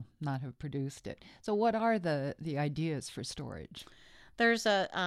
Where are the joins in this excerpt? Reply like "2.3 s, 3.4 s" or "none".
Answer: none